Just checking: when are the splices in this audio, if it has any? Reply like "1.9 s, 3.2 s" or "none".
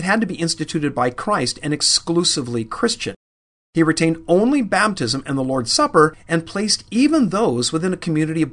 3.6 s

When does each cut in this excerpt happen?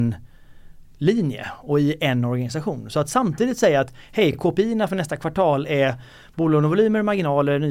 none

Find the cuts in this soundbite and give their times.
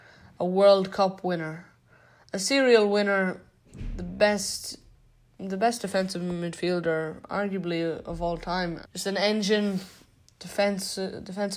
8.8 s

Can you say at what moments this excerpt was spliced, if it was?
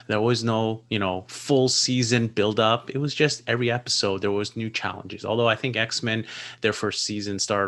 none

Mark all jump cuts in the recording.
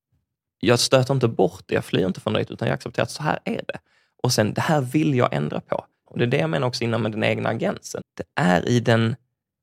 6.1 s, 8.0 s

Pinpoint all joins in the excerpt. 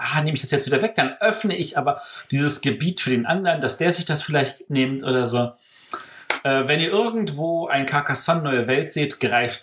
none

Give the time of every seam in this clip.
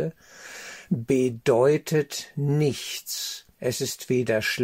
3.5 s

